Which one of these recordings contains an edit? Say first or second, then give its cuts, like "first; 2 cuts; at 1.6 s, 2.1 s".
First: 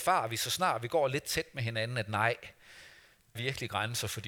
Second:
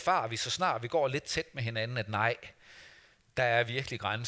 first; 1 cut; at 3.4 s